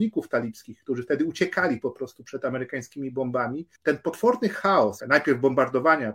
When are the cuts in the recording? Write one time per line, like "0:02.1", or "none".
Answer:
0:03.8
0:05.0